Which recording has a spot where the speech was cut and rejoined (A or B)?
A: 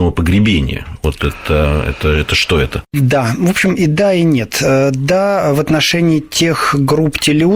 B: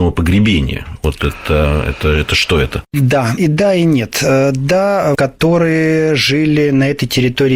B